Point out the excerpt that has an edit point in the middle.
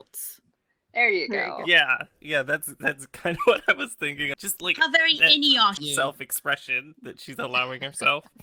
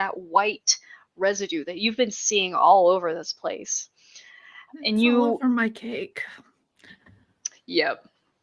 first; 2 cuts; at 4.3 s, 5.8 s

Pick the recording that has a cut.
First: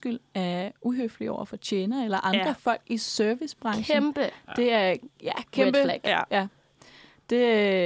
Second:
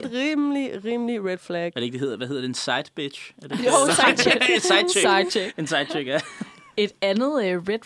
first; 1 cut; at 6.3 s

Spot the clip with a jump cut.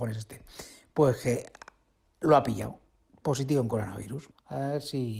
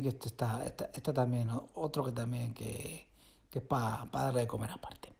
first; 1 cut; at 4.3 s

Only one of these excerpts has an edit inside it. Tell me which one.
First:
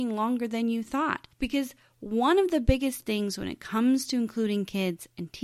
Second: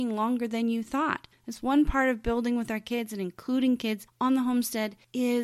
second; 1 cut; at 1.3 s

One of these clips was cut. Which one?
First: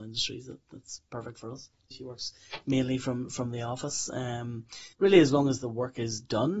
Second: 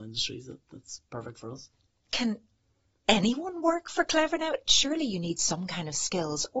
first; 2 cuts; at 1.9 s, 4.9 s

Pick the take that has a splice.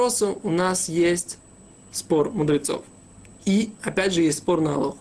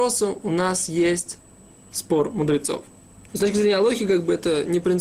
second; 1 cut; at 3.3 s

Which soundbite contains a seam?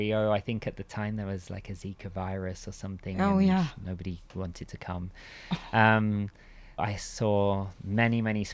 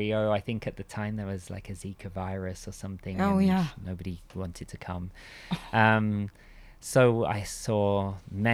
first; 1 cut; at 6.8 s

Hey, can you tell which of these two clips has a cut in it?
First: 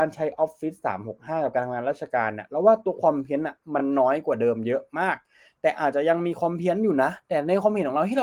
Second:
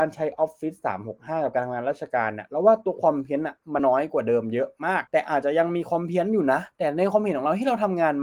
second; 2 cuts; at 3.8 s, 5.1 s

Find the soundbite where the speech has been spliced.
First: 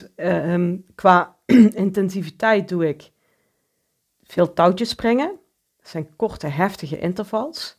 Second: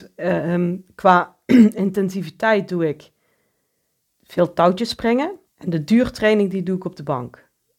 second; 1 cut; at 5.5 s

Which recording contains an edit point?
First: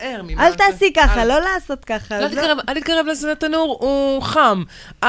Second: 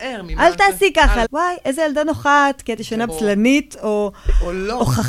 second; 2 cuts; at 1.2 s, 3.1 s

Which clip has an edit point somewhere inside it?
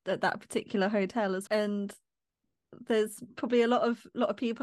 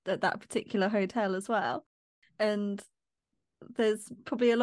first; 1 cut; at 1.5 s

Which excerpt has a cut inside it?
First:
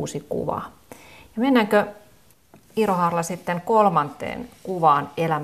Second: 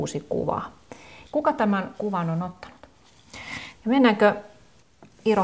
second; 2 cuts; at 1.2 s, 3.7 s

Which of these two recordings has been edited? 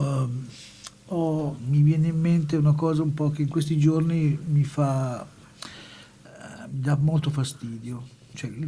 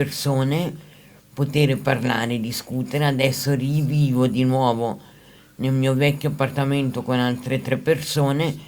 first; 1 cut; at 1.6 s

